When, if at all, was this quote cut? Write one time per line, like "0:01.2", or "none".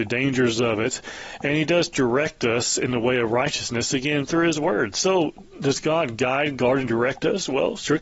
none